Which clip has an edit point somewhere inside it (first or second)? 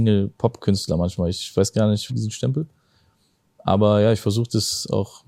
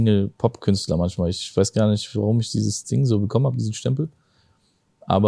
first